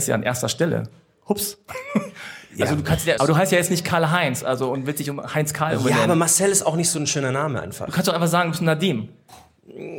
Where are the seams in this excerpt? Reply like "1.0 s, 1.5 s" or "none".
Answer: 3.2 s